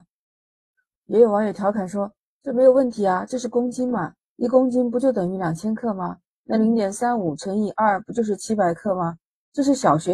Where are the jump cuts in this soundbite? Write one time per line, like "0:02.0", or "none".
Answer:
none